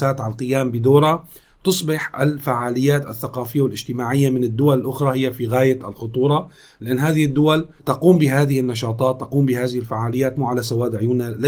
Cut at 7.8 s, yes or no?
yes